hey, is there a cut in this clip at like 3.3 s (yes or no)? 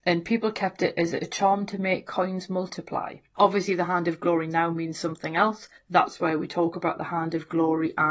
no